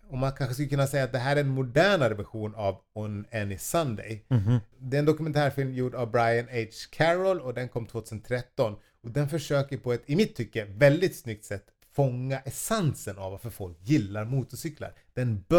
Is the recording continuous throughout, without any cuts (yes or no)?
yes